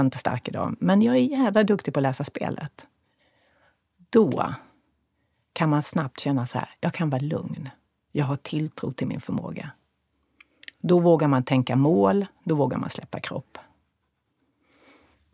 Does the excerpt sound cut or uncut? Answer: uncut